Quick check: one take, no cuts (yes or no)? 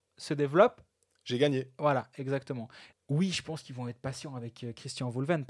no